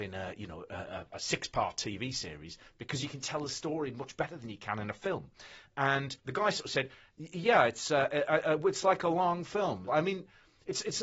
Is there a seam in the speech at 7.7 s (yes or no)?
no